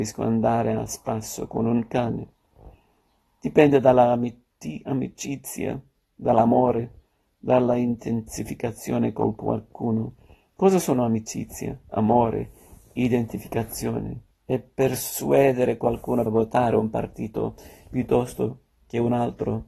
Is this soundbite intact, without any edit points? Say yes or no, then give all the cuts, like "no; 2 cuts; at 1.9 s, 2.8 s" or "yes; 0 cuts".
no; 2 cuts; at 14.3 s, 16.3 s